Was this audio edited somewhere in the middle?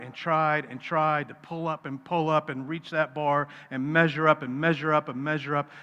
no; 0 cuts

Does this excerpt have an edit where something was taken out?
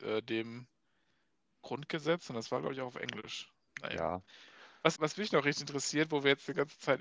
yes; 2 cuts; at 3.7 s, 4.9 s

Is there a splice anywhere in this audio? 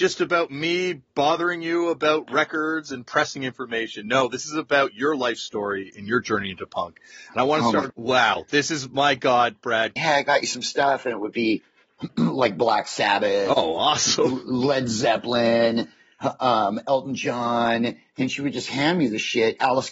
yes; 2 cuts; at 7.9 s, 10.0 s

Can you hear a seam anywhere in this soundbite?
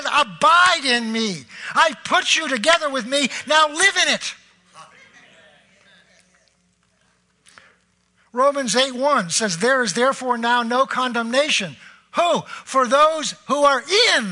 no; 0 cuts

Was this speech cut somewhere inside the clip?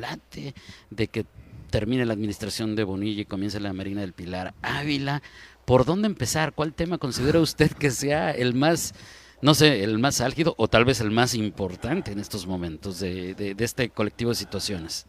no; 0 cuts

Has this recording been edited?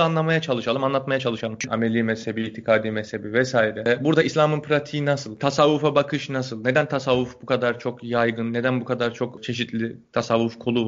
yes; 1 cut; at 1.7 s

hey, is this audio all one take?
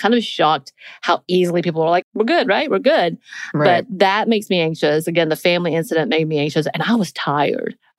no; 1 cut; at 2.0 s

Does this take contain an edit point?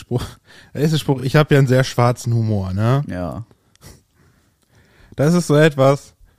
no; 0 cuts

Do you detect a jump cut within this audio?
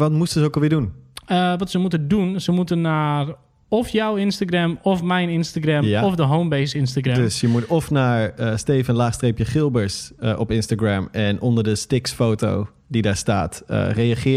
no; 0 cuts

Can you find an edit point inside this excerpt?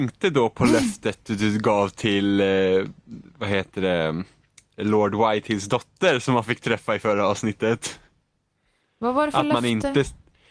no; 0 cuts

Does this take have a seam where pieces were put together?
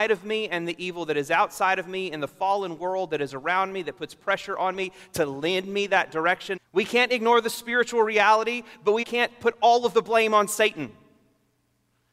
yes; 2 cuts; at 6.6 s, 9.0 s

